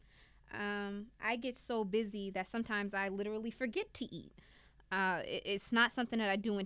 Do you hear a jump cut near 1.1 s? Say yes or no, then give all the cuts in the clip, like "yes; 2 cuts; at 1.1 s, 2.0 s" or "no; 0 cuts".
no; 0 cuts